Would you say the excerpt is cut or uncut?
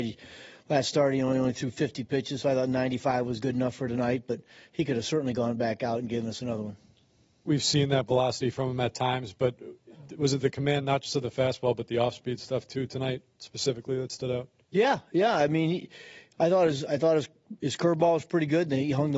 uncut